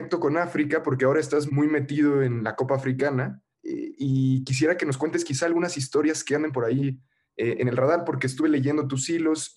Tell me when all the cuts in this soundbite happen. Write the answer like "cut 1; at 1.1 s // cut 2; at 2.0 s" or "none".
cut 1; at 1.5 s // cut 2; at 3.5 s